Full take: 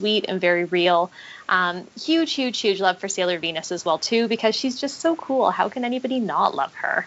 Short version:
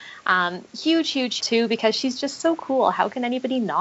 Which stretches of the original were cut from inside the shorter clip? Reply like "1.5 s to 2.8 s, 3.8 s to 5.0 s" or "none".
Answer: 2.6 s to 4.0 s